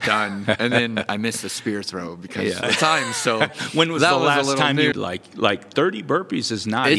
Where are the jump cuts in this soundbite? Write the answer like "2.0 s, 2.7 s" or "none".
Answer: 2.6 s, 4.9 s